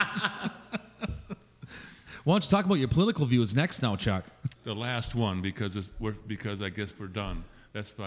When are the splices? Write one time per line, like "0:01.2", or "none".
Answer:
0:04.6